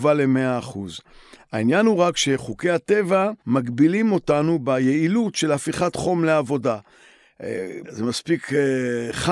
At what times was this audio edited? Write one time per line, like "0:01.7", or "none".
0:03.4
0:07.8